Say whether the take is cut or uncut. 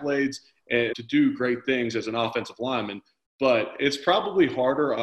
cut